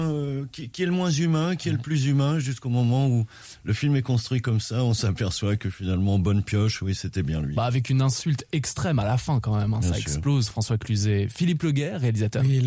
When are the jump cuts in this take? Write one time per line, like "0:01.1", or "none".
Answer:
none